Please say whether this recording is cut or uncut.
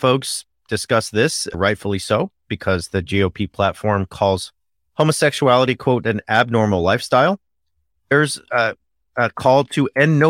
uncut